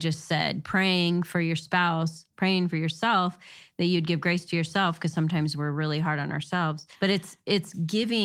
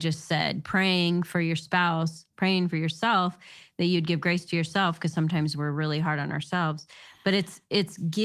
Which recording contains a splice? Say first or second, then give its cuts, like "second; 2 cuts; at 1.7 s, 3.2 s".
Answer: first; 1 cut; at 6.9 s